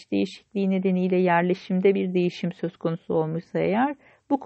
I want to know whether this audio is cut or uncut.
uncut